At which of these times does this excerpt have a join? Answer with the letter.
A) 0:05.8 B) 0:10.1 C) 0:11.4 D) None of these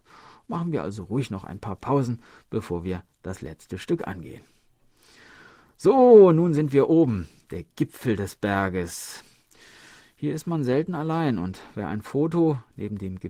D